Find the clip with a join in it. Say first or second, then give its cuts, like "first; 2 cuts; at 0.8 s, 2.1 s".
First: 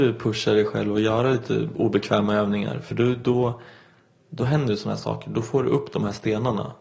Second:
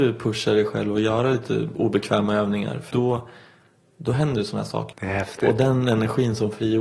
second; 2 cuts; at 2.9 s, 4.9 s